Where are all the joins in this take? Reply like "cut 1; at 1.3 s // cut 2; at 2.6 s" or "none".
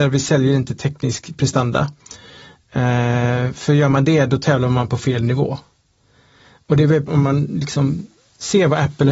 cut 1; at 7.1 s